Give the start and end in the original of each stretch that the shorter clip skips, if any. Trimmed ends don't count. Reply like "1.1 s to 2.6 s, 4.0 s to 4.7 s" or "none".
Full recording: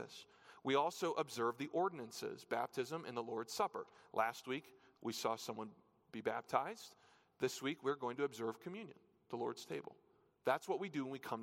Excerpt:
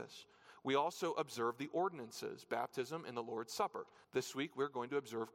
4.0 s to 7.3 s